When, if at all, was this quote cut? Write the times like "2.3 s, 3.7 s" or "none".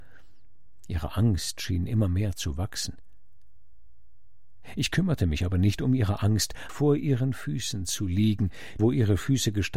6.7 s, 8.8 s